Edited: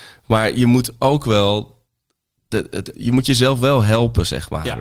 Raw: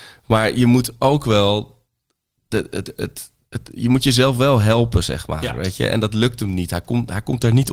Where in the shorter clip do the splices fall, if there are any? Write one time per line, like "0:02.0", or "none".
0:02.9